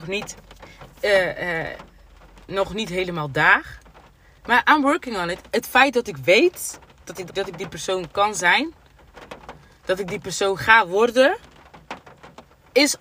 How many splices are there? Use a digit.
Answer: 1